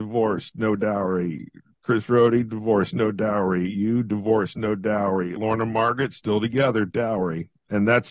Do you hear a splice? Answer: no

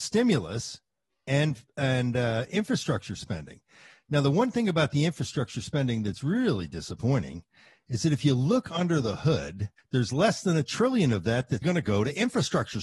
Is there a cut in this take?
yes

